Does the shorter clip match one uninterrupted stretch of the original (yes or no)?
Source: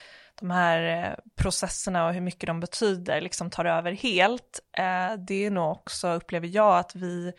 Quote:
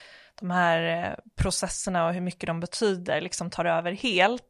yes